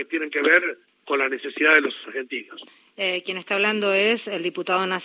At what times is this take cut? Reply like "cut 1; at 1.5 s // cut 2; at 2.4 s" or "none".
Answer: none